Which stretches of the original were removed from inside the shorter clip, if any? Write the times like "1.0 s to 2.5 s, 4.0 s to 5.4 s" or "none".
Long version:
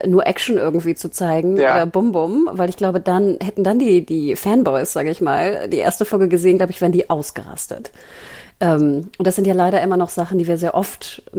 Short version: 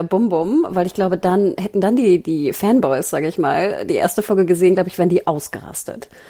none

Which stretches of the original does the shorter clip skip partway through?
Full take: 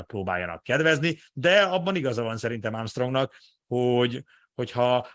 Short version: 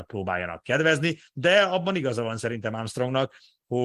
none

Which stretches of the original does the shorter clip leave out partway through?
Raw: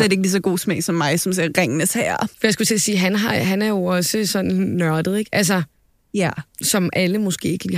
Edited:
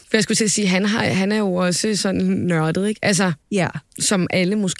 5.7 s to 6.0 s

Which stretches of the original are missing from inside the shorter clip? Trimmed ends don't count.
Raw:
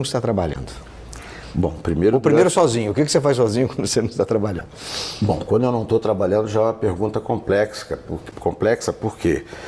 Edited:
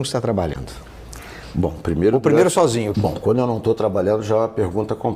2.9 s to 5.2 s

